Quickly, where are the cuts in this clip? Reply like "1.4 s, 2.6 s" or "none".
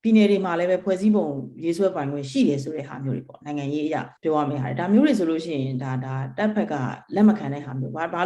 4.2 s